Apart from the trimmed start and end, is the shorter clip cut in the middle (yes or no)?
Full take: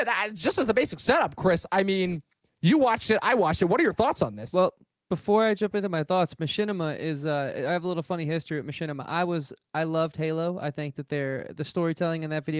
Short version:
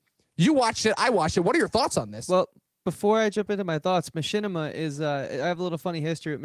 no